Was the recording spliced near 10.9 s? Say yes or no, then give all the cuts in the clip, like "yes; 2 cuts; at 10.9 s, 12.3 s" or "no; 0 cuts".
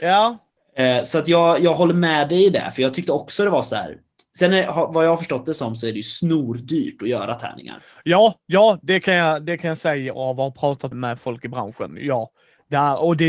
yes; 1 cut; at 10.9 s